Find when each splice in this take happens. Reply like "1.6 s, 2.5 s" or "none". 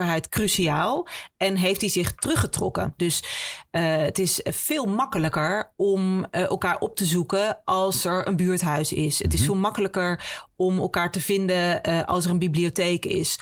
3.0 s